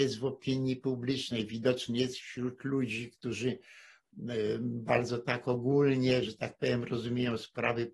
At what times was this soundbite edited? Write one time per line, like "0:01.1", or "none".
none